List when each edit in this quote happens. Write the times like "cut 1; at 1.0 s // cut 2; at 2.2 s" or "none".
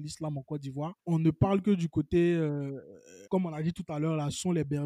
cut 1; at 1.0 s // cut 2; at 3.3 s